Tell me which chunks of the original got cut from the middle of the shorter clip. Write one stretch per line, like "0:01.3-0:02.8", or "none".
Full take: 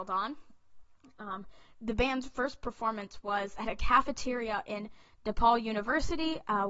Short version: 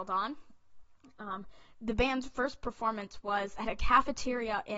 none